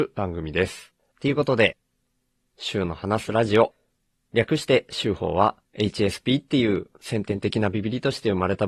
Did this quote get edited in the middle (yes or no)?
yes